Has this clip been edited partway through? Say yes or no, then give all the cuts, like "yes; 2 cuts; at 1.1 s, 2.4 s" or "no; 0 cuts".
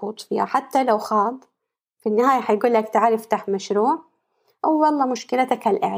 no; 0 cuts